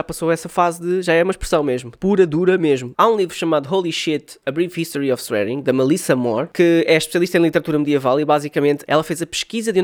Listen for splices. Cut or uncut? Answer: cut